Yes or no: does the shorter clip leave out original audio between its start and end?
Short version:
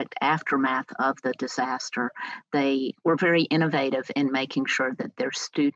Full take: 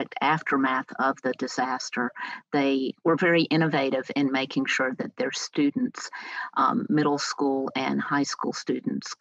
no